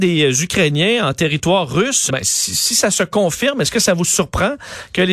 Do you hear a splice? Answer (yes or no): yes